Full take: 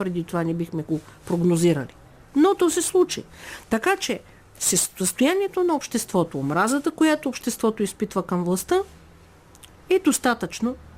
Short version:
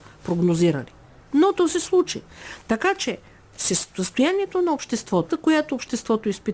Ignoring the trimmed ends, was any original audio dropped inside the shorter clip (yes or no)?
yes